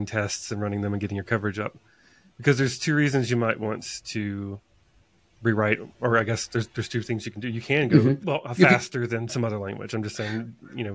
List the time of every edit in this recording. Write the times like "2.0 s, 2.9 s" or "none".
8.2 s